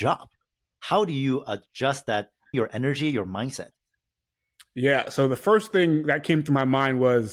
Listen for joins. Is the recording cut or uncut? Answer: cut